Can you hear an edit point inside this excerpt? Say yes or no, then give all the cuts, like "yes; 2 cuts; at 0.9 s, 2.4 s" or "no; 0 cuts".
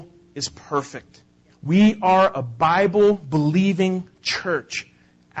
yes; 1 cut; at 1.5 s